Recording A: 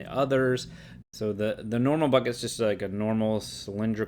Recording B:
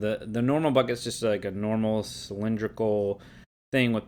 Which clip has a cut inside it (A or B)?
A